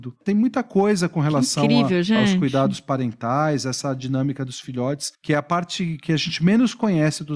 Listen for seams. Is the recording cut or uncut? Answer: uncut